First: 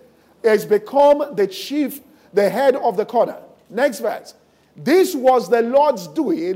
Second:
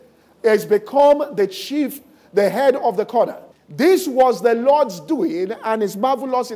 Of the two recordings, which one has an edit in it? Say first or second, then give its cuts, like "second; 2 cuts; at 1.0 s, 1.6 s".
second; 1 cut; at 3.5 s